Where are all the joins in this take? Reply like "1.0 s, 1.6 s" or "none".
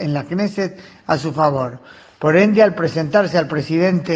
none